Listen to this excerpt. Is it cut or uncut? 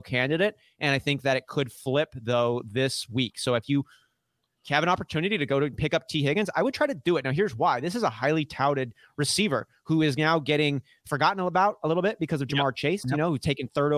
uncut